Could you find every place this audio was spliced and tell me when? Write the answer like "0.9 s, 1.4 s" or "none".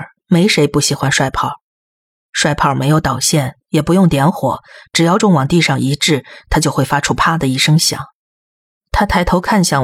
5.2 s, 8.8 s

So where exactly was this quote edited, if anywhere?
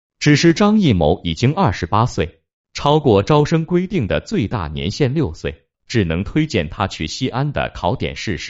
5.7 s

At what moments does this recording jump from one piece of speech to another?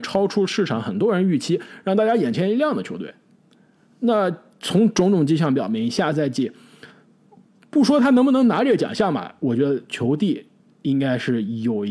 none

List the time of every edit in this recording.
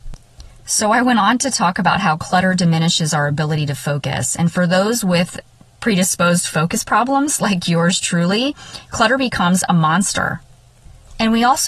none

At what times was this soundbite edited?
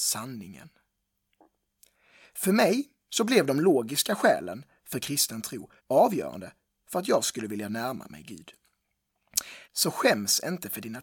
5.8 s, 9.6 s

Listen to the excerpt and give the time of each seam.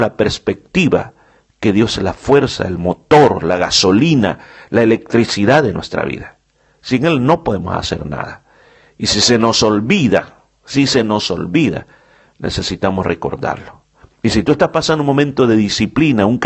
none

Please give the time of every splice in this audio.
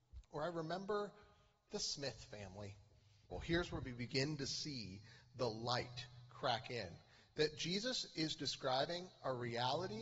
3.3 s

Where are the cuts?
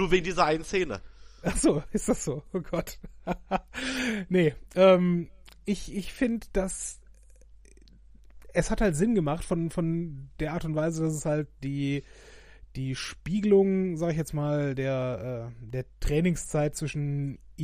none

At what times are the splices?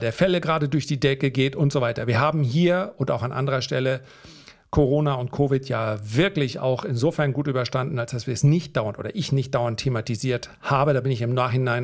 none

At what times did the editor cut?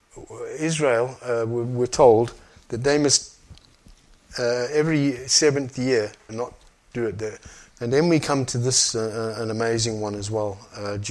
6.3 s, 7.7 s

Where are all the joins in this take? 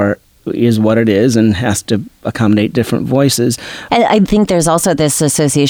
3.9 s

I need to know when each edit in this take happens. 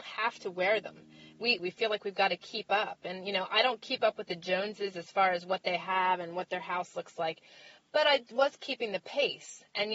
1.6 s

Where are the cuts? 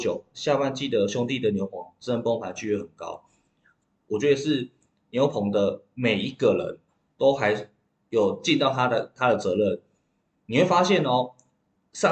4.0 s

